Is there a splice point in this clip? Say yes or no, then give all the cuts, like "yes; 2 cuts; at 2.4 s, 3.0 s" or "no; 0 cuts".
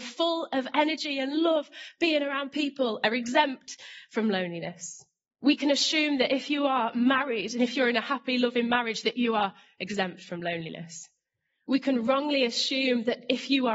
no; 0 cuts